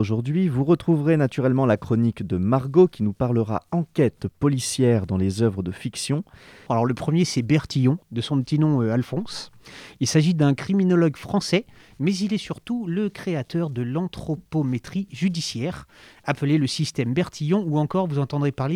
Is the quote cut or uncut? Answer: cut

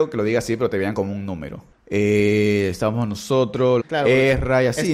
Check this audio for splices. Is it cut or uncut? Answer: cut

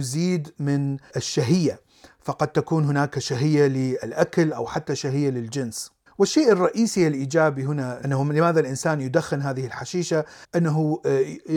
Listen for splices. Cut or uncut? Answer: uncut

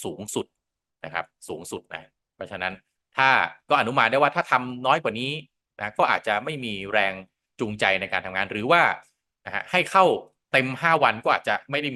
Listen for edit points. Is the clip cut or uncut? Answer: uncut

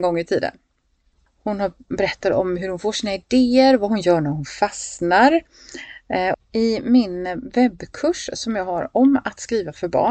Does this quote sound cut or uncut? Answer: cut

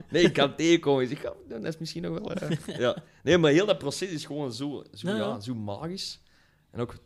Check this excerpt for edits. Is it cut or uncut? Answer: uncut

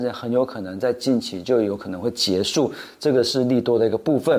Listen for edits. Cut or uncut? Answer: uncut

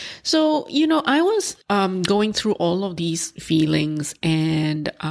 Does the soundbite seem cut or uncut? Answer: cut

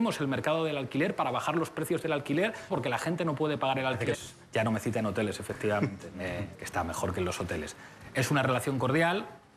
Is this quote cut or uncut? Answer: cut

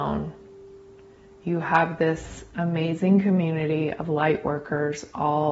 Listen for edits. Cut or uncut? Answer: uncut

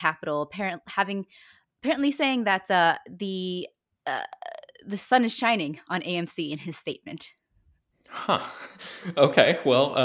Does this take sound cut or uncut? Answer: uncut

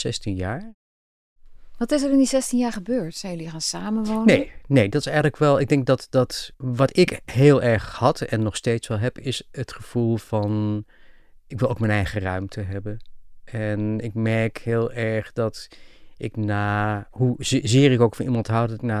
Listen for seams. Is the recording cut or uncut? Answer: uncut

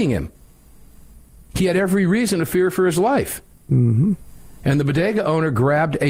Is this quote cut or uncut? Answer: uncut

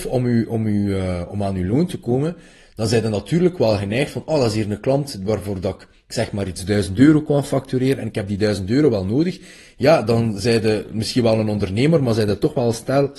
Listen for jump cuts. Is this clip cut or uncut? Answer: uncut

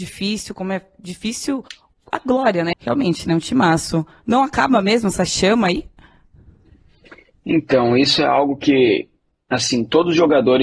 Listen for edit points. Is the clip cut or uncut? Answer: cut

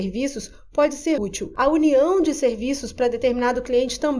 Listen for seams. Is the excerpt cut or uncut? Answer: cut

